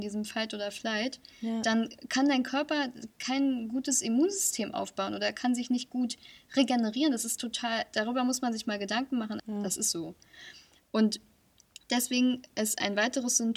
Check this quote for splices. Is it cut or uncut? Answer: cut